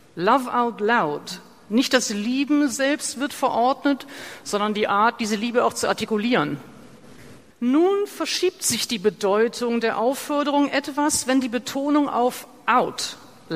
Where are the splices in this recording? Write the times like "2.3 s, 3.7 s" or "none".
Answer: 7.5 s